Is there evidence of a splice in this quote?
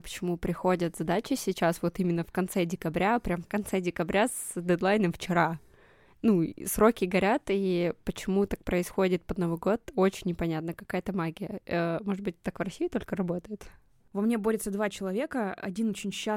no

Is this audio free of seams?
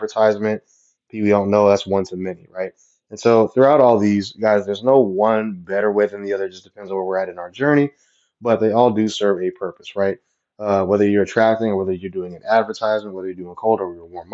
yes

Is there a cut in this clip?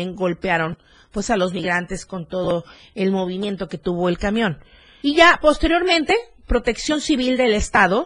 yes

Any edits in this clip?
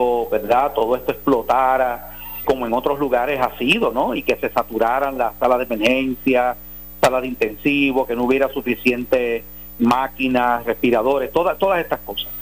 yes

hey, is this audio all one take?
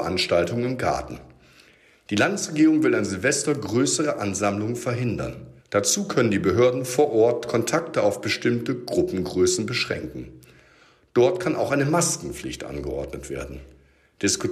no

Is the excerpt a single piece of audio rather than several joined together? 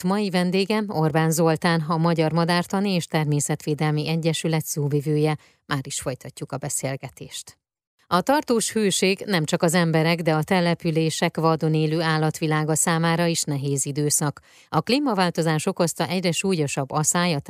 yes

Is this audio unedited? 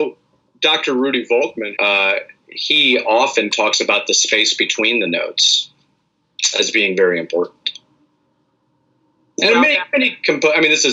no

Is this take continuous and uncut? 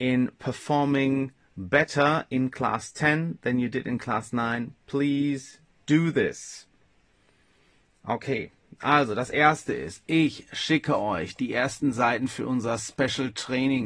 yes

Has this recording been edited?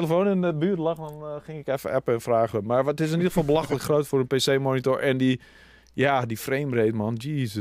no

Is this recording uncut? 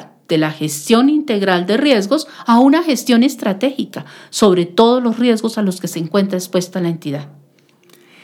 yes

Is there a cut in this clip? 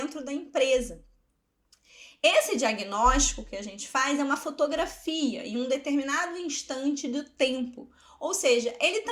no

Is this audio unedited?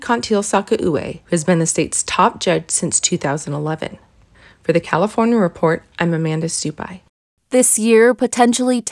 yes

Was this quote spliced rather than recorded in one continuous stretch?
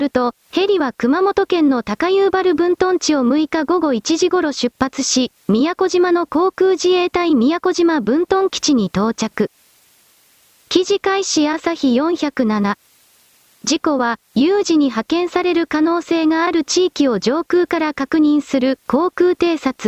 yes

